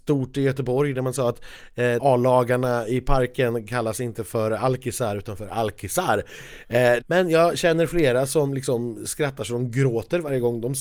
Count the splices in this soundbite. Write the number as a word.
two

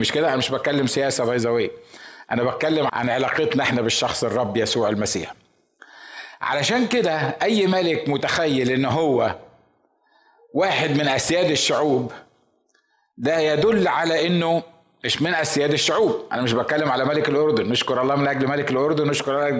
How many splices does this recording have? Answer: one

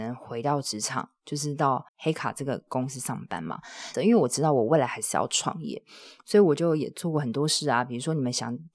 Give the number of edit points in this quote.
two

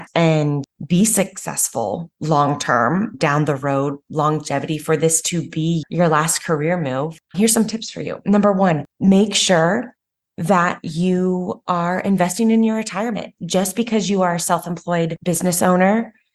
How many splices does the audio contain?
zero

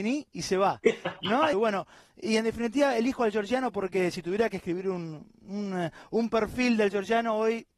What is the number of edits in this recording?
one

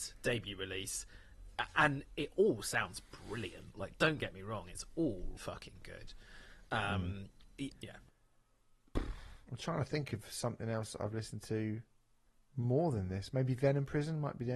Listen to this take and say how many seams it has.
two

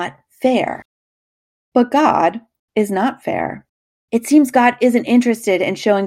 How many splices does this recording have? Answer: two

